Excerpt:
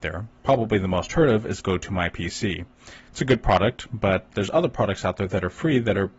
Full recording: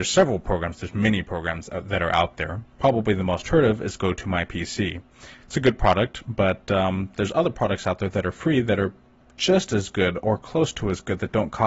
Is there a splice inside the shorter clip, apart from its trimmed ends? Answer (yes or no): yes